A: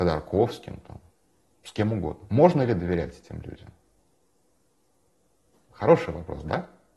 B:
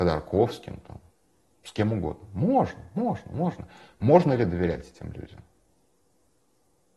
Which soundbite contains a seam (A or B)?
A